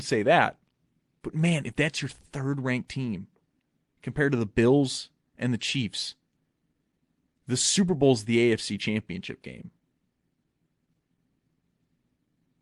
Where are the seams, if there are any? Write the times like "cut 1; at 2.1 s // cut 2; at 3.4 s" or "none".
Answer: cut 1; at 1.2 s

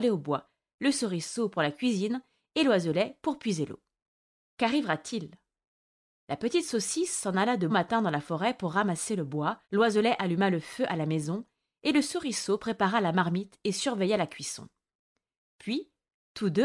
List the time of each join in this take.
cut 1; at 7.7 s // cut 2; at 9.6 s

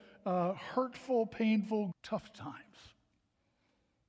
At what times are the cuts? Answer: cut 1; at 1.9 s

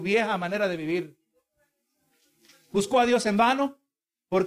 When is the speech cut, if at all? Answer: none

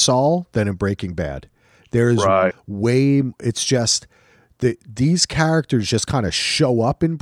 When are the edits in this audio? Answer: cut 1; at 2.5 s

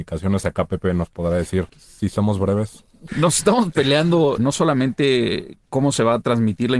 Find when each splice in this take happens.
cut 1; at 1.7 s // cut 2; at 3.1 s // cut 3; at 4.4 s

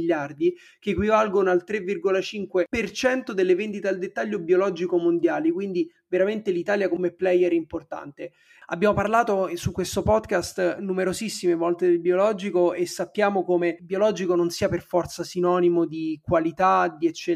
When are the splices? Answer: none

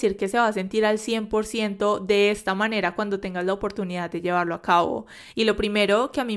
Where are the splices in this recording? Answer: cut 1; at 5.3 s

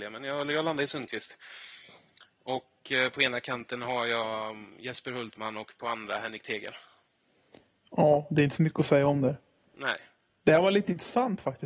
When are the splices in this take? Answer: none

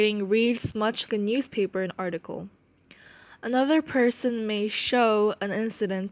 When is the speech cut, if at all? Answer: cut 1; at 1.1 s

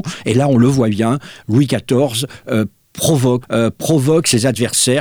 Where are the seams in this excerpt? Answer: cut 1; at 3.4 s

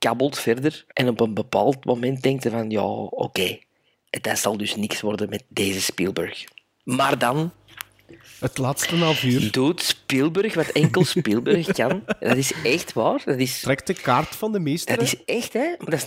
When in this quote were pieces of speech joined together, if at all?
cut 1; at 0.9 s

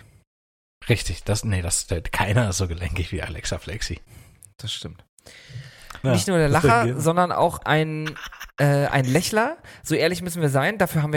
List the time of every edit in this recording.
cut 1; at 6.0 s

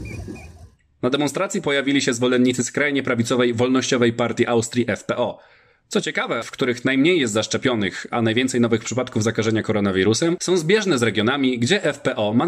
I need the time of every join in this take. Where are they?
cut 1; at 6.4 s

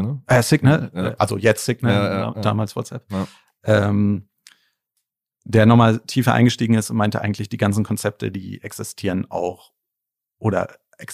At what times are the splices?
none

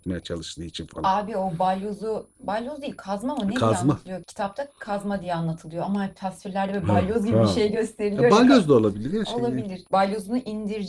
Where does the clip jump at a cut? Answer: none

